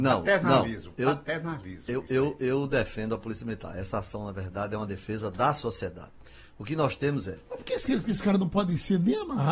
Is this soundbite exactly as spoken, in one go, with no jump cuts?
yes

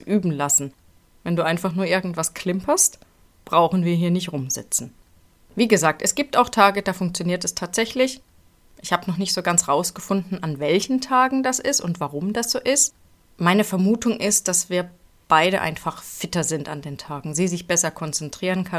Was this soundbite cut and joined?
no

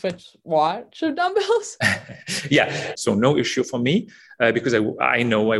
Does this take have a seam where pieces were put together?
yes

